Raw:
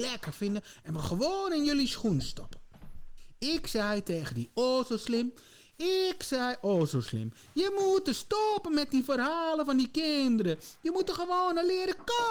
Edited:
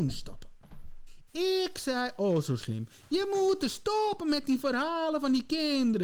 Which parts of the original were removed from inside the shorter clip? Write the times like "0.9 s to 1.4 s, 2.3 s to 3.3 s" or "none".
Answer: 3.4 s to 5.7 s